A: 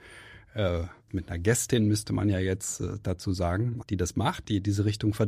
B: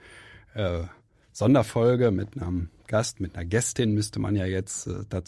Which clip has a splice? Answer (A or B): A